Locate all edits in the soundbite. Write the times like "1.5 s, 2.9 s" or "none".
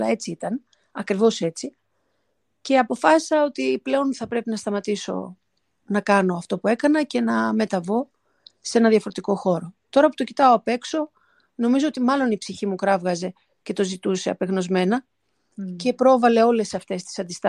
none